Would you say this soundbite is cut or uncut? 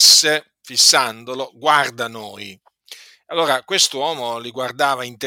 uncut